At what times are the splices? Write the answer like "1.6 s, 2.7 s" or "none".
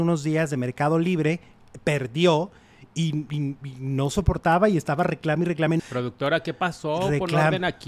5.8 s